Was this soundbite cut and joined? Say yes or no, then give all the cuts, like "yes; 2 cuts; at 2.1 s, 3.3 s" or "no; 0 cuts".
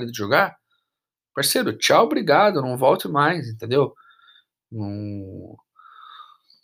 no; 0 cuts